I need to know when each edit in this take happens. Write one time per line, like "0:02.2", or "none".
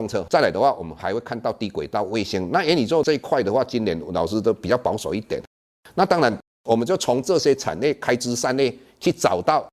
none

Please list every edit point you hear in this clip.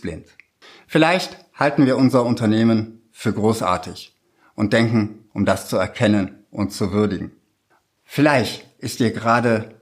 0:05.3
0:07.9

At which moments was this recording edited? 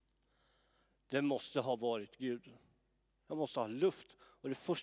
0:03.3

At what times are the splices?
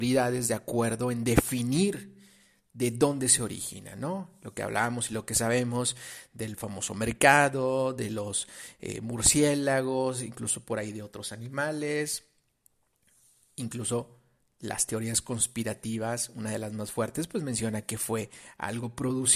none

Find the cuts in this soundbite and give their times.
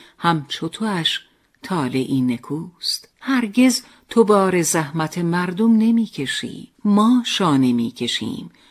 0:03.1
0:06.7

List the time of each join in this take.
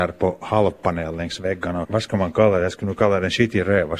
0:01.8

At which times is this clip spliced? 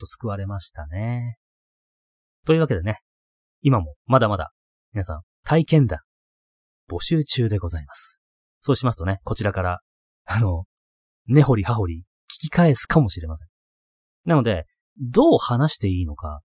0:08.4
0:14.8

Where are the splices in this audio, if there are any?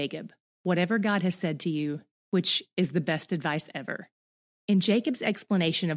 0:02.1

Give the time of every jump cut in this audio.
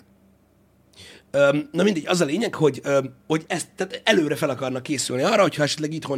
none

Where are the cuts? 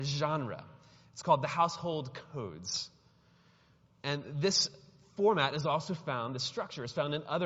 none

